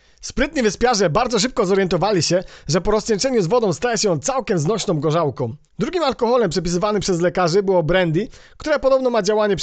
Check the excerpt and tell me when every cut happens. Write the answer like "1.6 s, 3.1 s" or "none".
5.7 s